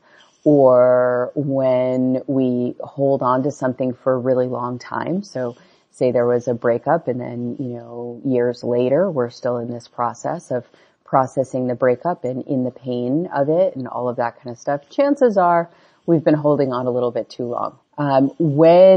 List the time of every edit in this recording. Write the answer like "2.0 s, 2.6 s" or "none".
17.8 s

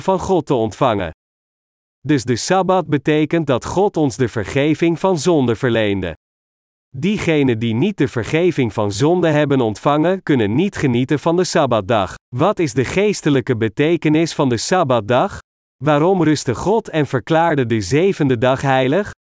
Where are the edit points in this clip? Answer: 1.9 s, 12.2 s

